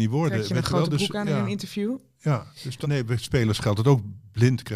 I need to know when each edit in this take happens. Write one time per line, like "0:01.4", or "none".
0:02.8